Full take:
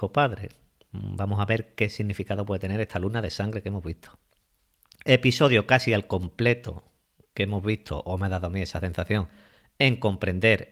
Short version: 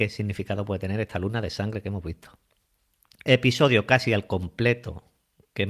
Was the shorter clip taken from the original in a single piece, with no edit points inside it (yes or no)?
yes